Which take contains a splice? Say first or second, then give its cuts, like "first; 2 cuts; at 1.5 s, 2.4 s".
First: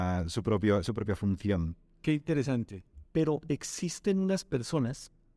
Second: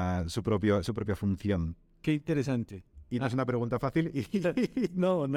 first; 1 cut; at 3.0 s